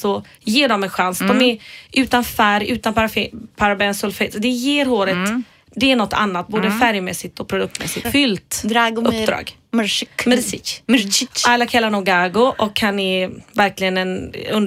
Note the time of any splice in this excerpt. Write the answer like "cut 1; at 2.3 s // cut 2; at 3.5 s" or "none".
cut 1; at 8.0 s